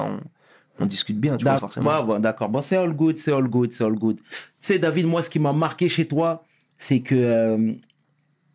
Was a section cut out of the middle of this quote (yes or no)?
yes